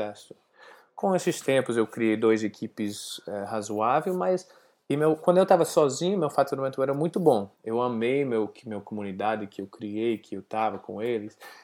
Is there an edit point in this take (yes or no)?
yes